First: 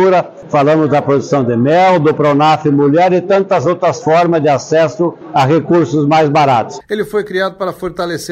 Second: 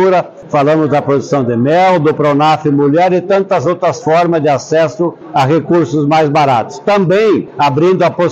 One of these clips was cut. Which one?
first; 1 cut; at 6.8 s

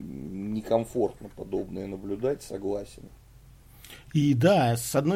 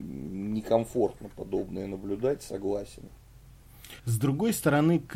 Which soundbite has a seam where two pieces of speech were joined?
second; 1 cut; at 4.0 s

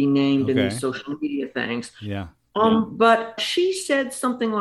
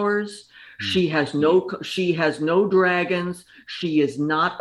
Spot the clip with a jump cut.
first; 1 cut; at 3.4 s

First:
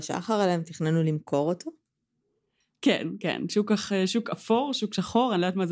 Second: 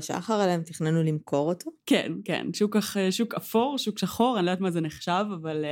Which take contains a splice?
second; 1 cut; at 1.8 s

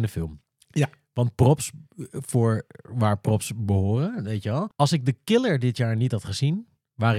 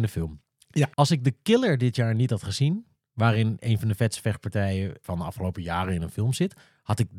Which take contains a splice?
second; 1 cut; at 0.9 s

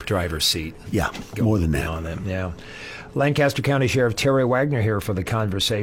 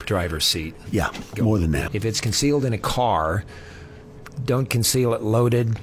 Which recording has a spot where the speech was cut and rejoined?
second; 1 cut; at 1.9 s

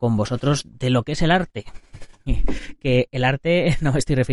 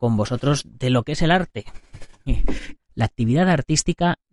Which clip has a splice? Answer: second; 1 cut; at 2.8 s

